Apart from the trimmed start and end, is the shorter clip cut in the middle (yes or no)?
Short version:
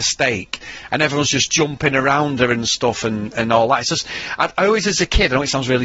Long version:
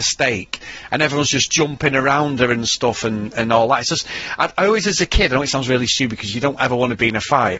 no